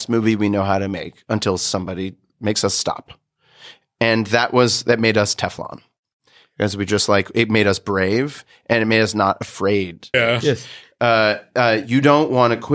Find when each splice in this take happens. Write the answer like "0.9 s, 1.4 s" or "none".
10.1 s